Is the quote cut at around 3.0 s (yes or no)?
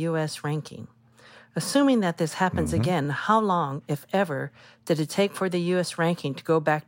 no